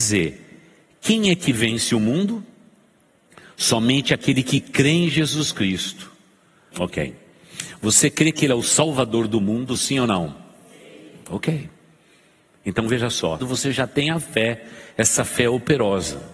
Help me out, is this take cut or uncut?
cut